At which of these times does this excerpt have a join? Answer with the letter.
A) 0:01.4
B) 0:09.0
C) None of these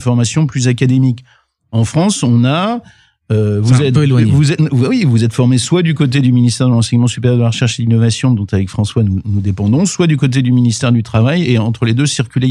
C